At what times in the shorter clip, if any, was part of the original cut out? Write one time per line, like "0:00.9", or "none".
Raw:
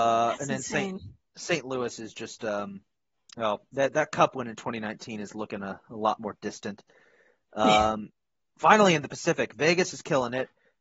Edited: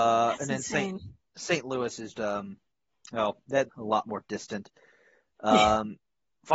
0:02.1
0:03.7